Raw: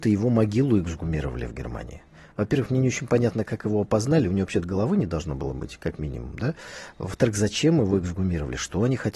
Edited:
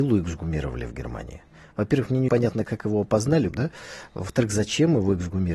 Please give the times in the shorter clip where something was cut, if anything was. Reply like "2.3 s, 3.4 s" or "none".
2.3 s, 3.5 s